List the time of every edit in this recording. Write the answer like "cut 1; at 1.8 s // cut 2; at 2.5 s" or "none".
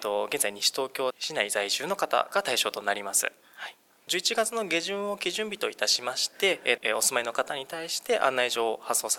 cut 1; at 1.1 s // cut 2; at 6.8 s